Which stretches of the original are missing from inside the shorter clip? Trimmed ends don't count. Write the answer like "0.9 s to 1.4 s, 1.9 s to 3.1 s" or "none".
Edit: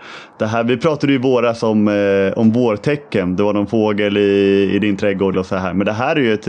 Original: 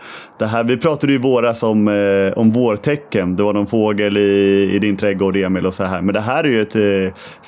5.3 s to 5.6 s